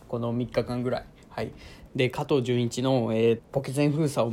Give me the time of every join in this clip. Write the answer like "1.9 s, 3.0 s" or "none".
1.9 s, 3.4 s